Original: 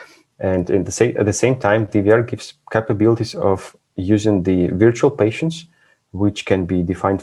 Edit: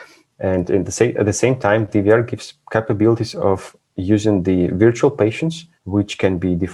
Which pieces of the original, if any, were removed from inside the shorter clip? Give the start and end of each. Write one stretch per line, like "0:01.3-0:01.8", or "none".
0:05.7-0:06.0